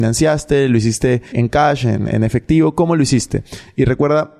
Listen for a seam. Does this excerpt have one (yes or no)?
yes